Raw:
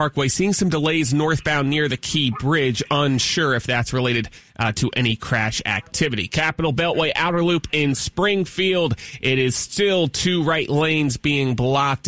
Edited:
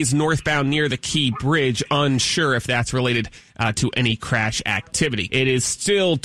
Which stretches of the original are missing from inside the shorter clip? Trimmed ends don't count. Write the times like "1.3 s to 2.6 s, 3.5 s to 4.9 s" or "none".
6.3 s to 9.2 s